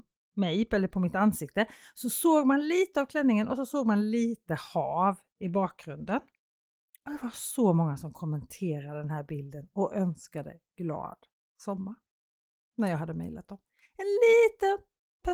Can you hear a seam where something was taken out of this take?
no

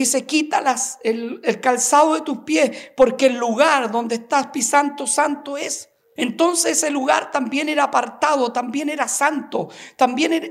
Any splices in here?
yes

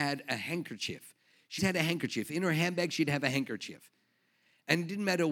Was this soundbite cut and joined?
yes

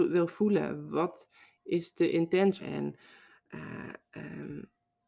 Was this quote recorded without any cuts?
no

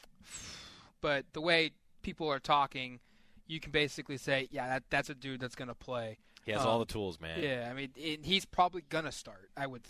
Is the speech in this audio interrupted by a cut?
yes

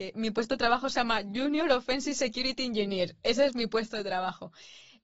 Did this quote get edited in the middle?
no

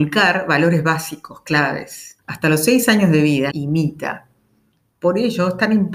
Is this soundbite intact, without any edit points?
no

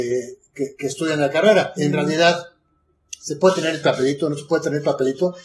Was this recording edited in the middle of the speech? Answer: yes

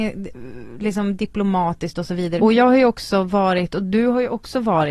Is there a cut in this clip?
yes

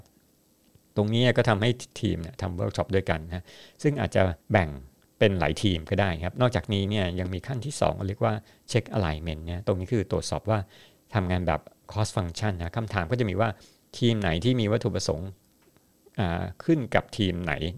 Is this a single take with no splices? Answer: no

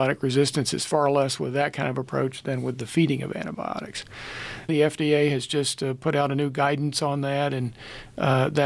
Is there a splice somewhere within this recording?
yes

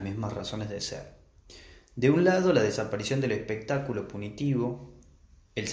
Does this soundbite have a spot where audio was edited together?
no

